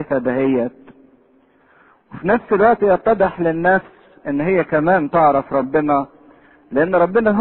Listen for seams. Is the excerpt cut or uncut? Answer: uncut